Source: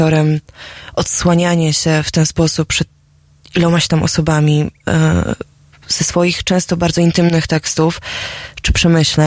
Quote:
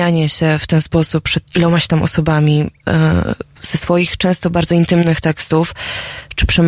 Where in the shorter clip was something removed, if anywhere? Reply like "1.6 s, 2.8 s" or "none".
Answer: 1.5 s, 3.5 s